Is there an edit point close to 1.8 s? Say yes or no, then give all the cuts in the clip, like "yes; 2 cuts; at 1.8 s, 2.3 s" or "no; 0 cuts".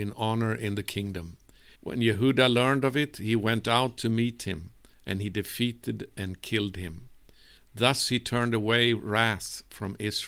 yes; 2 cuts; at 1.8 s, 7.6 s